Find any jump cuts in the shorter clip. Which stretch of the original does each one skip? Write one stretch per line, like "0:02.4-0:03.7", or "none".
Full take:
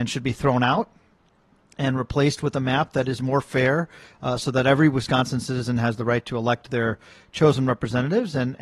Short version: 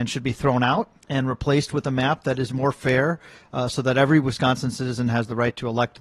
0:01.0-0:01.7